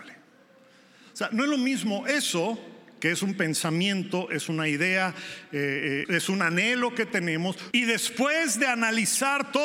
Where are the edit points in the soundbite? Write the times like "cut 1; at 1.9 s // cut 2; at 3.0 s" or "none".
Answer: cut 1; at 6.1 s // cut 2; at 7.7 s